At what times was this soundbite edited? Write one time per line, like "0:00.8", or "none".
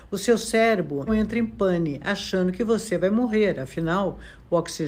0:01.1